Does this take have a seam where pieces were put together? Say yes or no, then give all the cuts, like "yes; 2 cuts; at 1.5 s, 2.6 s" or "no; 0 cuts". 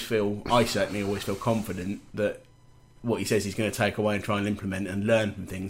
no; 0 cuts